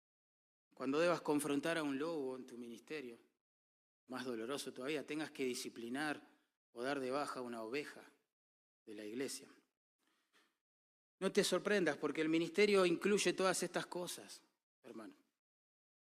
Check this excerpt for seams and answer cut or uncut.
cut